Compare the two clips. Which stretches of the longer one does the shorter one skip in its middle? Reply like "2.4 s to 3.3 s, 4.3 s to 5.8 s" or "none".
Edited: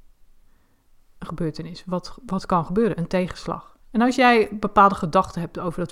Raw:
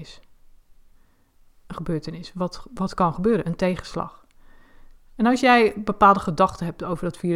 4.3 s to 5.0 s